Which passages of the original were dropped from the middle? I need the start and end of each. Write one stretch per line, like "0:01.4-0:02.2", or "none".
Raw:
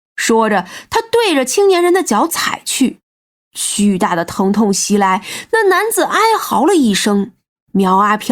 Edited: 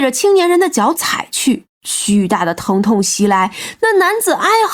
0:03.1-0:03.4